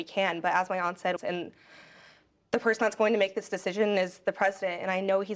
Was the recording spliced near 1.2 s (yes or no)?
yes